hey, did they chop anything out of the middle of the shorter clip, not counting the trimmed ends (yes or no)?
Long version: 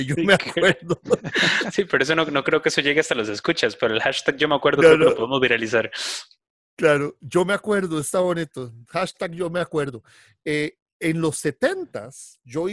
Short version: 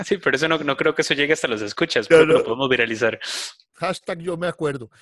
yes